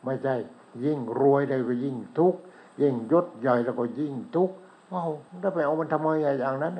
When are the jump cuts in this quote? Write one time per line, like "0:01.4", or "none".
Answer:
0:05.3